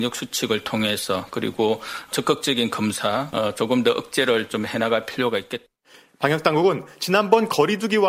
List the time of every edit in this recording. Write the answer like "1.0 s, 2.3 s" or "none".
none